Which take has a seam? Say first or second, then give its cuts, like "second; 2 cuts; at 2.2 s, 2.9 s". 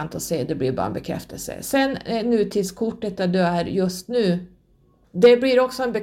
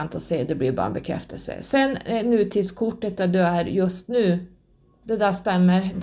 second; 1 cut; at 5.0 s